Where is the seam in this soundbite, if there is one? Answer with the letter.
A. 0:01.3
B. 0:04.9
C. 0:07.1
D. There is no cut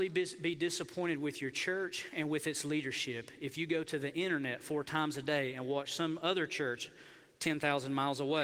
D